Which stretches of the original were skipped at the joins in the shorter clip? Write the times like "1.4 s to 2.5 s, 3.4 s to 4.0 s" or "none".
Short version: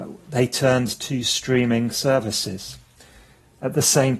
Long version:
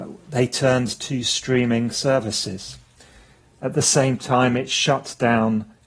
none